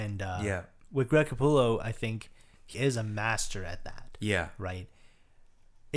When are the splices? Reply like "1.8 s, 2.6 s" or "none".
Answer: 2.7 s